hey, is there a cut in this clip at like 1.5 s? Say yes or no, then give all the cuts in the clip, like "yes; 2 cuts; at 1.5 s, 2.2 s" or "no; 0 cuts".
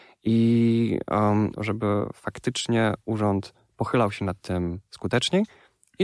yes; 1 cut; at 1.5 s